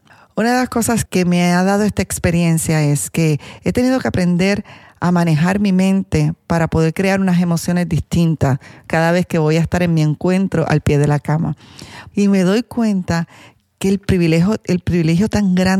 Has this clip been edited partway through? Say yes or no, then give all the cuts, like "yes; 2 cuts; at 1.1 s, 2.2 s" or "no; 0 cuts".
yes; 2 cuts; at 1.1 s, 12.1 s